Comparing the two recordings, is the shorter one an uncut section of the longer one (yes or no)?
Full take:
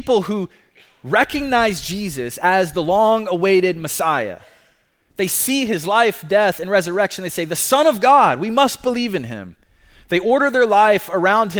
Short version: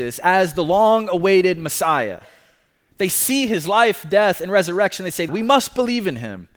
no